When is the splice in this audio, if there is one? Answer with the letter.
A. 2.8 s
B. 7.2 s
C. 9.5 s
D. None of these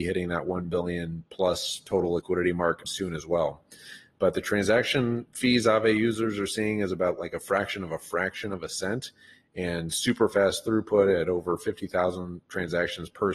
A